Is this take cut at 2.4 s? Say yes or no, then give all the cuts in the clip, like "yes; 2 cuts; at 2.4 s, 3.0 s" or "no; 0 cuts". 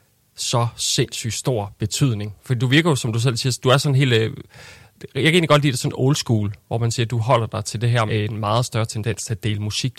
yes; 2 cuts; at 2.4 s, 8.1 s